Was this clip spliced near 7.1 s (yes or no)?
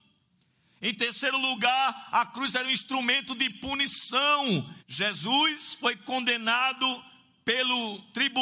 no